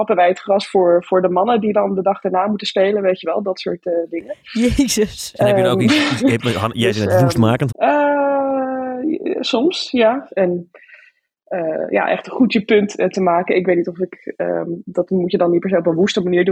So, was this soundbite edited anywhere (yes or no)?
yes